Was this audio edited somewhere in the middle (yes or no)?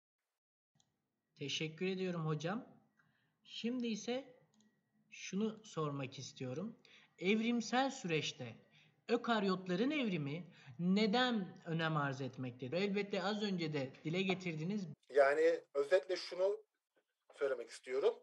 yes